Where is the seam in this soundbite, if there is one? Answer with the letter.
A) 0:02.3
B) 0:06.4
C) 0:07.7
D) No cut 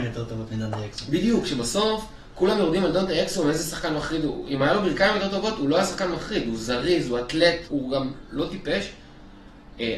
C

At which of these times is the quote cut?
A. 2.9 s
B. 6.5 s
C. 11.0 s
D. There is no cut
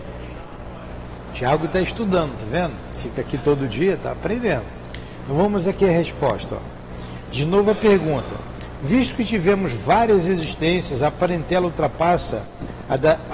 D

